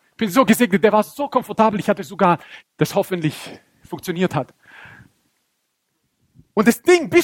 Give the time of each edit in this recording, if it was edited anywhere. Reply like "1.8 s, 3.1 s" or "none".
2.6 s